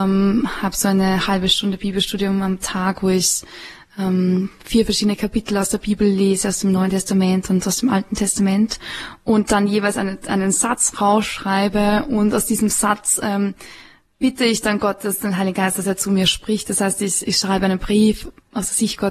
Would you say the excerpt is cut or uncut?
uncut